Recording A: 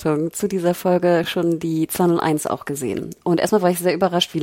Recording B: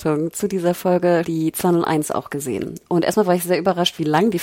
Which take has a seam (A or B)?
B